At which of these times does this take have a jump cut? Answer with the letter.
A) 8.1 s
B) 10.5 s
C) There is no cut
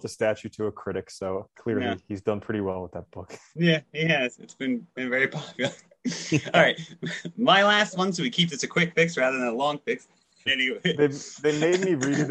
B